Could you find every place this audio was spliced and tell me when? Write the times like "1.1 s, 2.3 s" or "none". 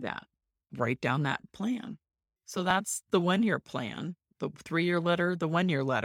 2.4 s